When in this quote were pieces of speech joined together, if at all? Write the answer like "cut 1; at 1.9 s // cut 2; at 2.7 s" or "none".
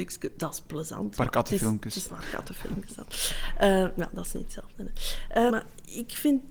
cut 1; at 2.1 s // cut 2; at 5.5 s